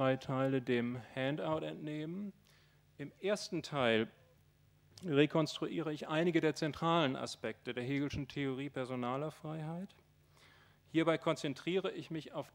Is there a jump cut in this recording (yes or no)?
no